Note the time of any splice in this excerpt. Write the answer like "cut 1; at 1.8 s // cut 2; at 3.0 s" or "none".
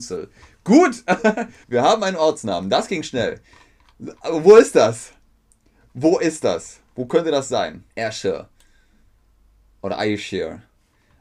cut 1; at 1.6 s // cut 2; at 7.9 s